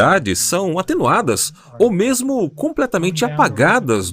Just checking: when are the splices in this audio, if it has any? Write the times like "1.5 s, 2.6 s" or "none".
none